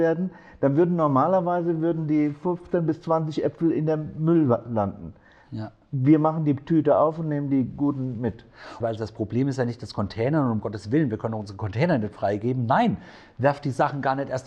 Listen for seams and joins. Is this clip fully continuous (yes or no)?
no